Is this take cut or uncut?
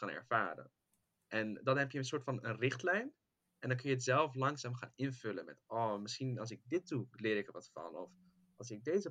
uncut